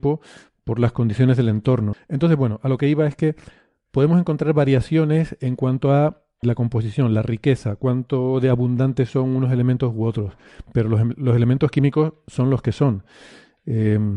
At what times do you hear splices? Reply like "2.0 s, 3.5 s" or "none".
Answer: 1.9 s, 6.4 s